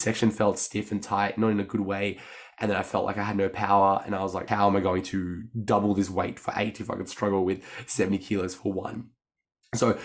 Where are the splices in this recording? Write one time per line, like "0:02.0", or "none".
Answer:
0:04.5